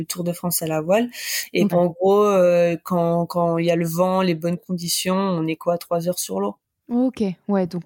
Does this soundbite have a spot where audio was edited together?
yes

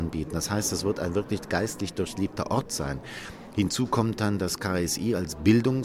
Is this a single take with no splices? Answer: yes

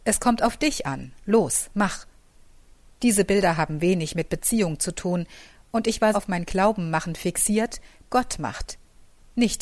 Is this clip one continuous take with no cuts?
no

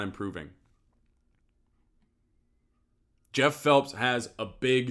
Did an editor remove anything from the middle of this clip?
no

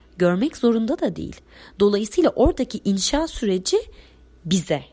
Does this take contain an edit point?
no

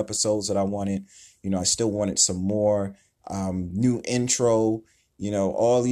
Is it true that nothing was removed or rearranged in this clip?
yes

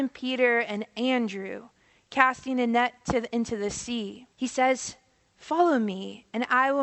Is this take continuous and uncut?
no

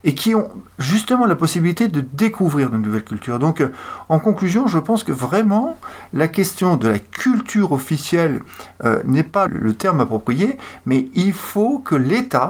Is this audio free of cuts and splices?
no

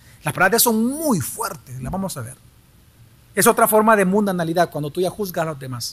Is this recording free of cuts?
yes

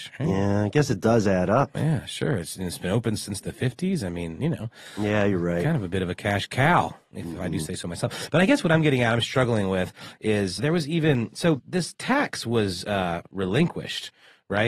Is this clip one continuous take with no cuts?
no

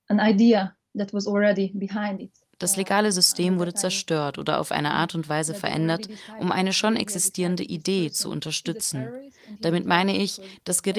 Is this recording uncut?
yes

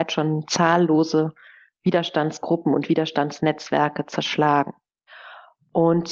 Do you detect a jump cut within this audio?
no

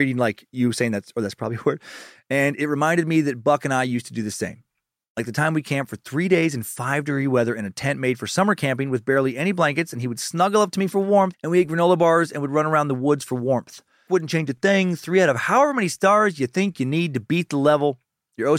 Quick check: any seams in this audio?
yes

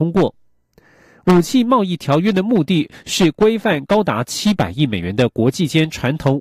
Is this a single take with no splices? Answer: yes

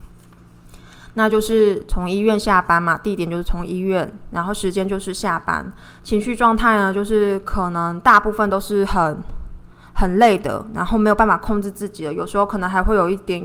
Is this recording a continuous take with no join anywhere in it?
yes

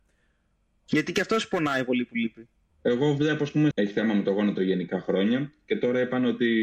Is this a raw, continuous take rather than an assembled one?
no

